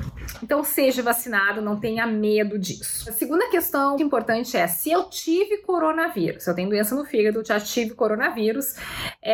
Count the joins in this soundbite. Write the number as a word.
one